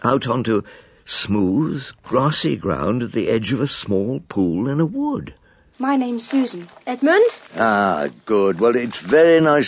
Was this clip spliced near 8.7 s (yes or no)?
no